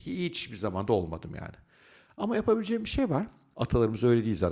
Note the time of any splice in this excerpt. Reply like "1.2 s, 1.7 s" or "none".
3.5 s

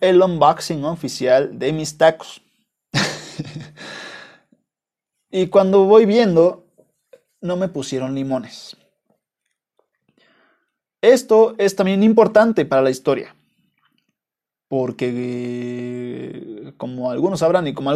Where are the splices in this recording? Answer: none

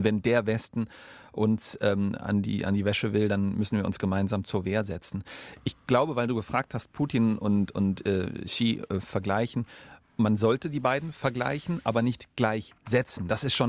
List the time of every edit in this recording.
none

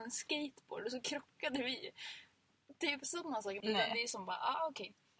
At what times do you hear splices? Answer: 3.6 s

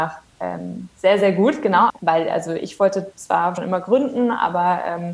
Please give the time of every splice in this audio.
1.9 s, 3.6 s

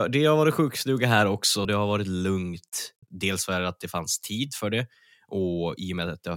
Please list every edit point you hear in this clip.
1.6 s, 3.0 s

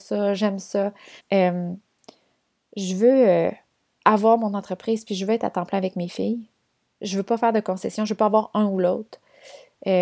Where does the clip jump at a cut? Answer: 1.2 s

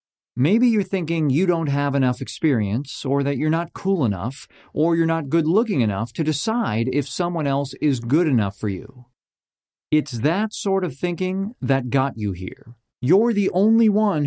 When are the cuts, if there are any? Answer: 12.9 s

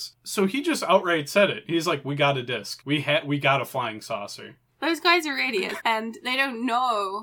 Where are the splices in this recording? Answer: 4.7 s, 5.8 s

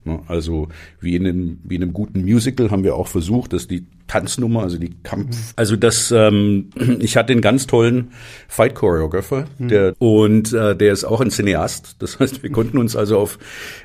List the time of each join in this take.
5.5 s, 9.9 s

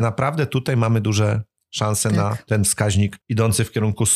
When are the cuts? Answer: 3.2 s

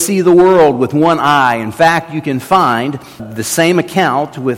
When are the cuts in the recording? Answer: 3.2 s

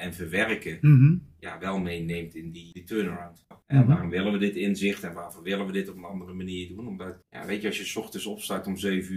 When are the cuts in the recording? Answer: 3.5 s

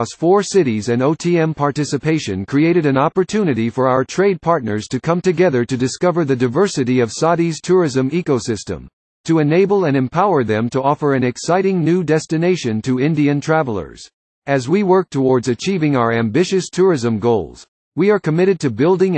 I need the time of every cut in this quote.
14.4 s

